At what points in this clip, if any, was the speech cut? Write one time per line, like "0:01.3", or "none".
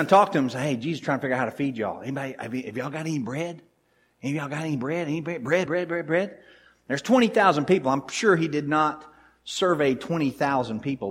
0:05.7